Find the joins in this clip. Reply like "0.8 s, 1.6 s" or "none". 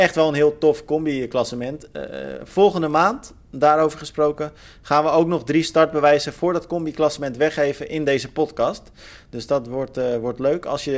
none